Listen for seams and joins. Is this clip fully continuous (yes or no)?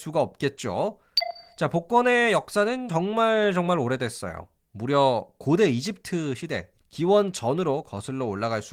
yes